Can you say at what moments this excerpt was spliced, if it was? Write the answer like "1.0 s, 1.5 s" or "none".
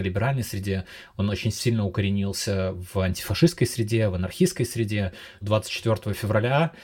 5.4 s